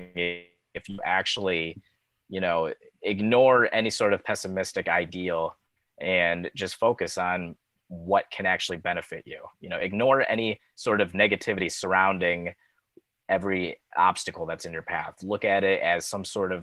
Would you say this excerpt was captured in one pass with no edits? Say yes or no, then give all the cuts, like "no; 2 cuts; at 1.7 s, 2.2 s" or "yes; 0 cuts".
yes; 0 cuts